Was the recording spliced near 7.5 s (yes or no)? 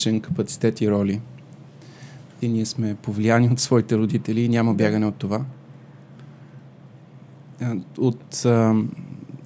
no